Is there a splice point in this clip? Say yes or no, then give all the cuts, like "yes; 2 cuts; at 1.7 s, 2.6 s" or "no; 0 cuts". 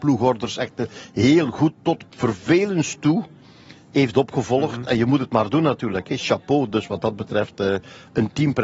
no; 0 cuts